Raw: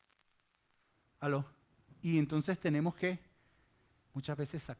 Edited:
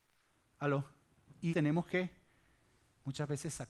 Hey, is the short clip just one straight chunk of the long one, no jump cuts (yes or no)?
no